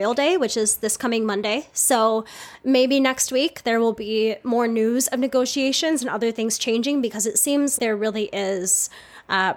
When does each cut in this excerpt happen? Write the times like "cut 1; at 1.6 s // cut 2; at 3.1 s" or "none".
cut 1; at 7.8 s